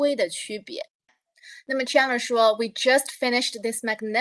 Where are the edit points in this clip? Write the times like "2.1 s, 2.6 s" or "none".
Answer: none

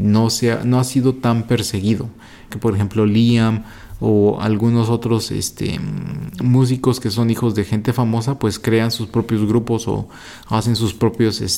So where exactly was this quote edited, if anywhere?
2.5 s

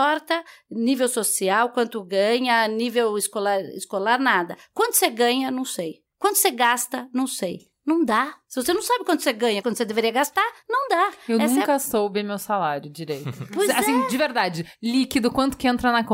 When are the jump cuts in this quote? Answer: 9.6 s

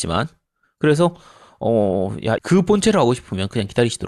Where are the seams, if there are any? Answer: 2.4 s

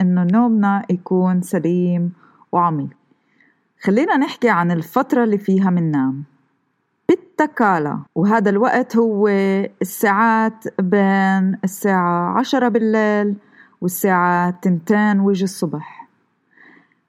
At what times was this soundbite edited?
8.1 s

